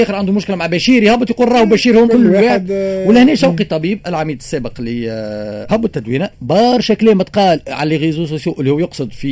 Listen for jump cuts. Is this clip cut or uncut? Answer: cut